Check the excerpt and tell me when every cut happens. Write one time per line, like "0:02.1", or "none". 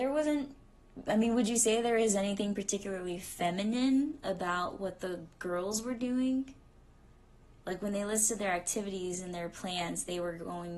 none

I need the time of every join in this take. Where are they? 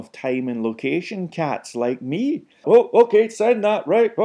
0:02.6

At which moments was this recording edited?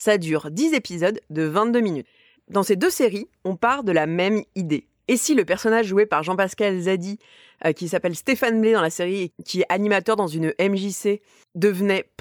0:05.1

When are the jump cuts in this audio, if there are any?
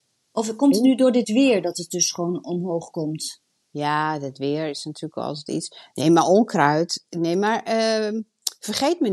none

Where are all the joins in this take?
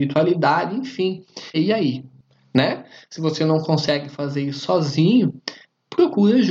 0:01.5

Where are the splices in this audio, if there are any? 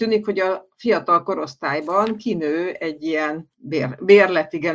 0:03.5

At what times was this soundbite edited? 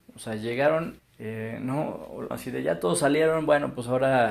0:01.0
0:02.3

